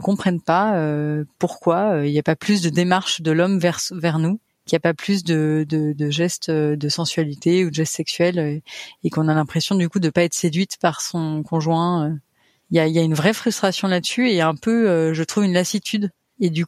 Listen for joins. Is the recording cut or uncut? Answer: uncut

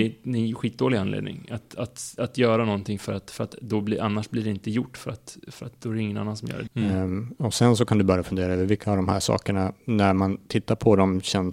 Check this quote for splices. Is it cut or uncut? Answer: cut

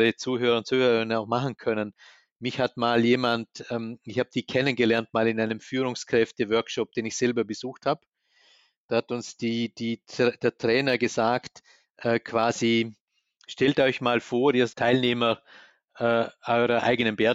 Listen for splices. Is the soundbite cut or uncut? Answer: cut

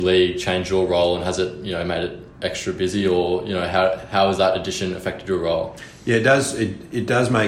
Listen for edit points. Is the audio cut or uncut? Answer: uncut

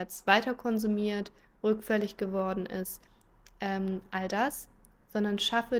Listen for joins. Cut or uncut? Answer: uncut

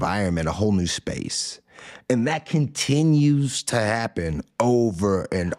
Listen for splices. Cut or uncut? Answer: uncut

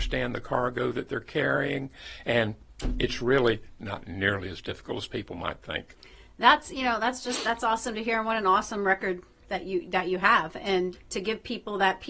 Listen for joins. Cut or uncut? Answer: cut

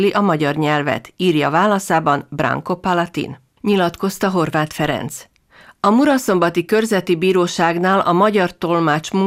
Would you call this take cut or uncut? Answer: cut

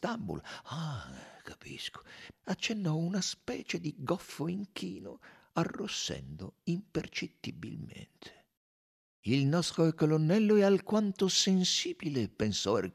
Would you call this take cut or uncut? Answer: cut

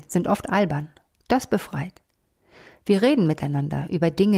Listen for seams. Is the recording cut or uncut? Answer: uncut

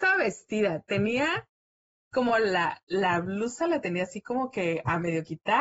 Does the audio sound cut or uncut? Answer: uncut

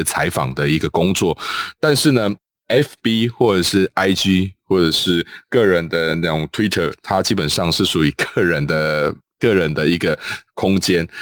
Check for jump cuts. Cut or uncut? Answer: uncut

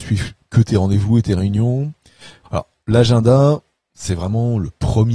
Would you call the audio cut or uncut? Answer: cut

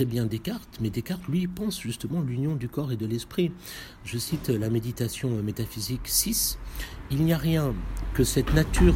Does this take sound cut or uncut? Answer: uncut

